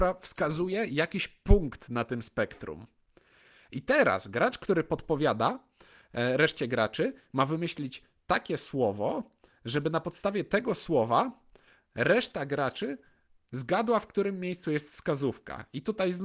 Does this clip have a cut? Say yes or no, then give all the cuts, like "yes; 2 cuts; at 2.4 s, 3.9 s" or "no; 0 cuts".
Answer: no; 0 cuts